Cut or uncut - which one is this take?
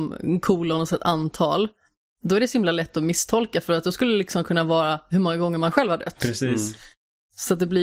uncut